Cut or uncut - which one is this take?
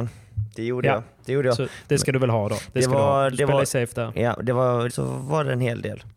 cut